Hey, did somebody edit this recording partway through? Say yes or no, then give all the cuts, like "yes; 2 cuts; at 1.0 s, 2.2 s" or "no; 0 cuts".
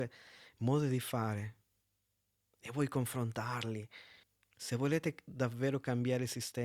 no; 0 cuts